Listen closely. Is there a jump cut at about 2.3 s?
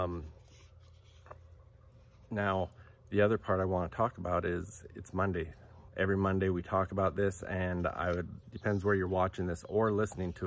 no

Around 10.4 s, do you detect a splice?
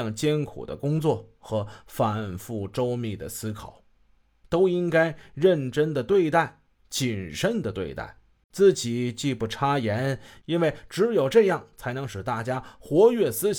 yes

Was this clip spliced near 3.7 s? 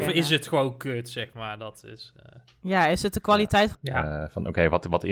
yes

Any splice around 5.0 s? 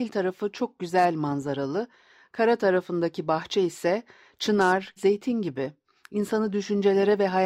yes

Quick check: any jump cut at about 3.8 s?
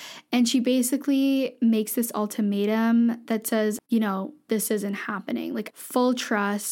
yes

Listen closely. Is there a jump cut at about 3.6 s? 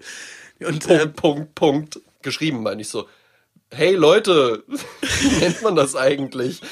no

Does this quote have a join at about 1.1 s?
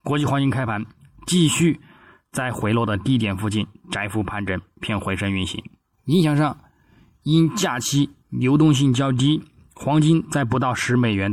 no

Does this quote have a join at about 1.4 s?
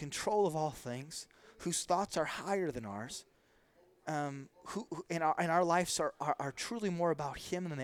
no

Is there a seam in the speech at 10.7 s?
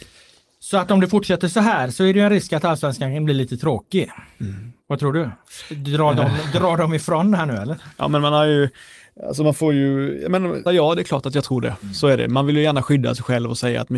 yes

